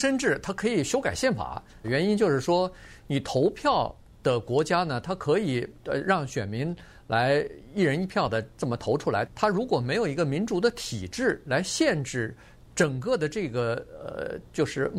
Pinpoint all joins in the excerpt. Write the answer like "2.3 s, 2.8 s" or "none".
1.8 s, 9.3 s